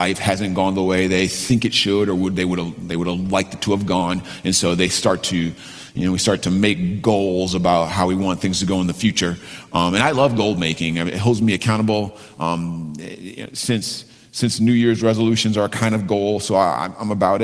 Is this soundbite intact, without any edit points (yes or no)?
yes